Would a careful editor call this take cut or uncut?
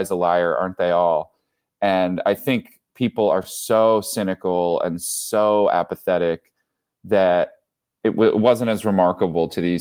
uncut